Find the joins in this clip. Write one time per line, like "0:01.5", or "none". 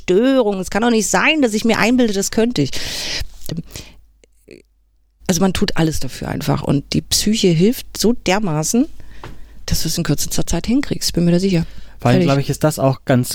0:03.5